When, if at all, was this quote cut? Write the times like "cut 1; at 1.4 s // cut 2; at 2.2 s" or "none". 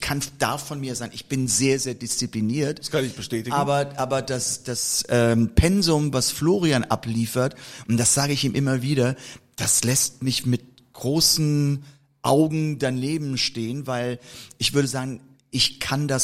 cut 1; at 10.4 s